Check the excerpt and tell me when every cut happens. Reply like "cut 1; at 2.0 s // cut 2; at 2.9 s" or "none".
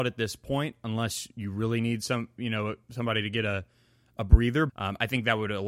cut 1; at 4.7 s